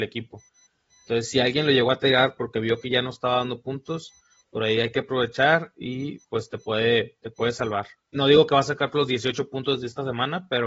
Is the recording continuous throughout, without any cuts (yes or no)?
no